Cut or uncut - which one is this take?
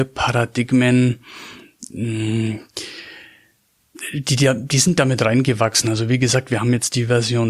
uncut